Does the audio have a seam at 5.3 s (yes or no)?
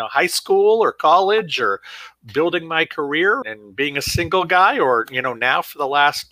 no